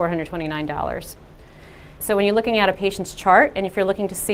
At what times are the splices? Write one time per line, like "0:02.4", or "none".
0:02.0